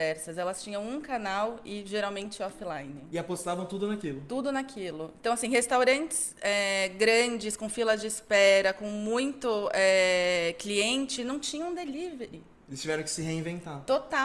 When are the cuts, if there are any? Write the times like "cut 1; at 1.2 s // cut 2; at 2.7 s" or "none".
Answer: none